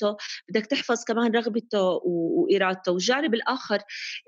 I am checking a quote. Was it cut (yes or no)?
no